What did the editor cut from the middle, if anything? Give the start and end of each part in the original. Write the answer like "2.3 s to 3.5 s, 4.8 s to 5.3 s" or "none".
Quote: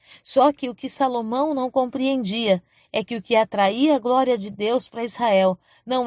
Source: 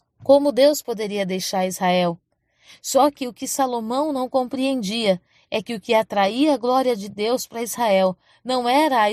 none